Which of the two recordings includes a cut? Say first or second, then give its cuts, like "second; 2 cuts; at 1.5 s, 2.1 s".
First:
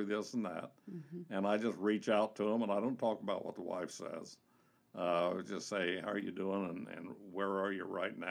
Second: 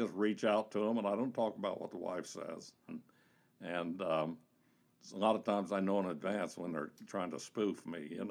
second; 1 cut; at 2.9 s